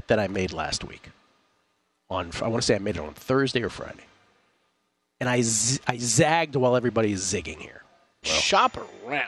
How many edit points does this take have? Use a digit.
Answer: 1